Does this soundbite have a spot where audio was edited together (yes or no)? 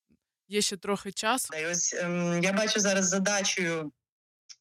yes